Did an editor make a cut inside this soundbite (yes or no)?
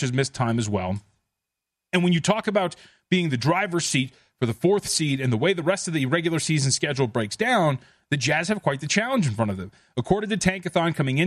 no